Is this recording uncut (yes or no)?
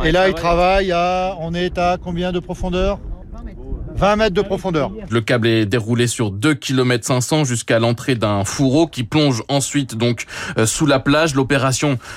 no